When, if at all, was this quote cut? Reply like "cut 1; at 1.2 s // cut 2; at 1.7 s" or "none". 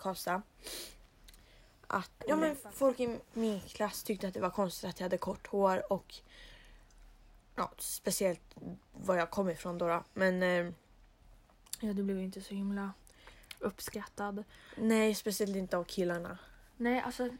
cut 1; at 2.2 s

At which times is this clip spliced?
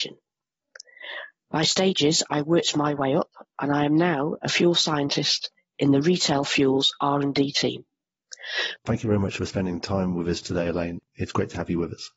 cut 1; at 8.8 s

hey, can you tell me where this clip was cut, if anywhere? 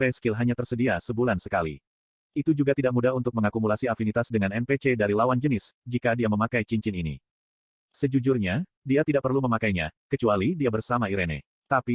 none

